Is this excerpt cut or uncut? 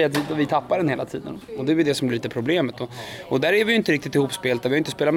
uncut